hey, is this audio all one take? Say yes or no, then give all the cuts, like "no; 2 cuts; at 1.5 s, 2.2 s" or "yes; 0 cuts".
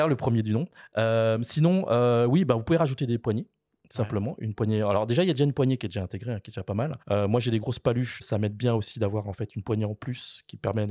no; 2 cuts; at 7.0 s, 8.2 s